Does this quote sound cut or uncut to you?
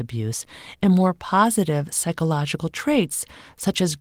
uncut